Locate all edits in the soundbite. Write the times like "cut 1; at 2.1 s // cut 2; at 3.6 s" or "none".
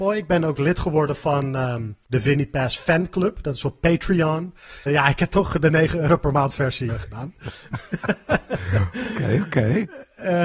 cut 1; at 2.0 s // cut 2; at 4.9 s // cut 3; at 6.9 s

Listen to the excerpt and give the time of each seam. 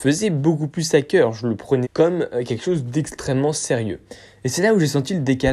cut 1; at 1.8 s

